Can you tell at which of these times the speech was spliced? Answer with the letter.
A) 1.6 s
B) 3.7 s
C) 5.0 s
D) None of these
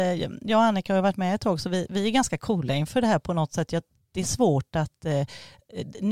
D